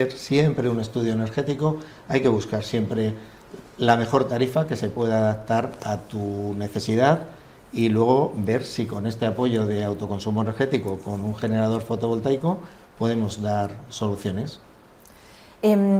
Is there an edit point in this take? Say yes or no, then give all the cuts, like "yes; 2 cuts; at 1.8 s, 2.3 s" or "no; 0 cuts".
no; 0 cuts